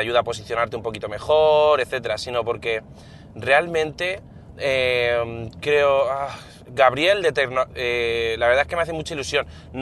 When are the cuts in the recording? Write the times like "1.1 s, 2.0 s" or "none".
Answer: 1.8 s, 4.6 s, 7.7 s